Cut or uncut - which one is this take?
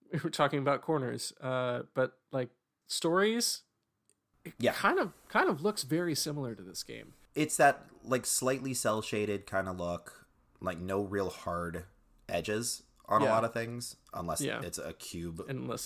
uncut